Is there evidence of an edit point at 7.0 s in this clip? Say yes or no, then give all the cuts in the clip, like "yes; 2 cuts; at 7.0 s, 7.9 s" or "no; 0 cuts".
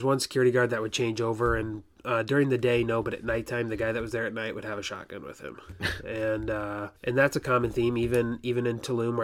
yes; 1 cut; at 7.0 s